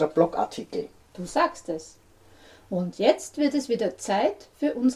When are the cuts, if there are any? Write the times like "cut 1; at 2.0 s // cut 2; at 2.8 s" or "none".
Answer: none